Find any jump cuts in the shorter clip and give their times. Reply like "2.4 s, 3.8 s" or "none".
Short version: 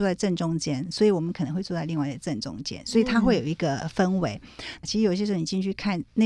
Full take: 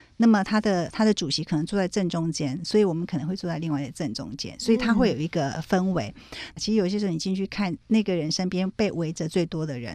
none